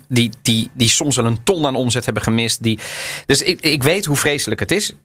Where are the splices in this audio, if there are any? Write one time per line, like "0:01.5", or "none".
none